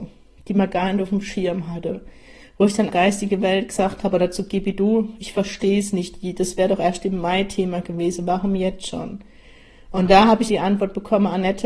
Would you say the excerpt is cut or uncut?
cut